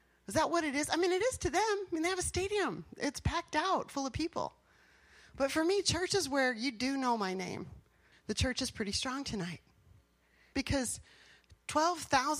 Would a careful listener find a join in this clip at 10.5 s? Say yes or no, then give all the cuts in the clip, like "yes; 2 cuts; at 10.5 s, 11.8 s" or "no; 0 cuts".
yes; 2 cuts; at 8.1 s, 10.5 s